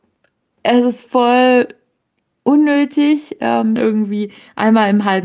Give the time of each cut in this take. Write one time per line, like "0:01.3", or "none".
0:03.8